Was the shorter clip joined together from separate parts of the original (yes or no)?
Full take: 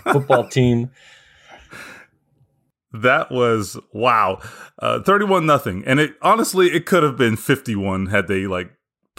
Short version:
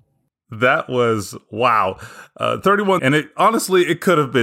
yes